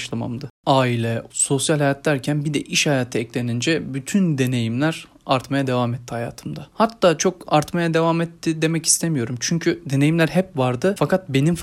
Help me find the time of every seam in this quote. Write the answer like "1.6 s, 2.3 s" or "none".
1.3 s